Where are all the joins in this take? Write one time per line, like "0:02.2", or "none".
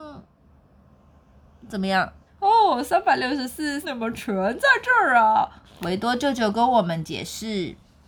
0:02.3
0:03.8
0:05.7